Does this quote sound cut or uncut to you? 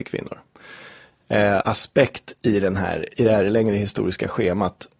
cut